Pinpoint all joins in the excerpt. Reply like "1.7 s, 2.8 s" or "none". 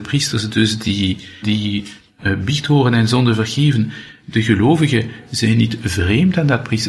1.4 s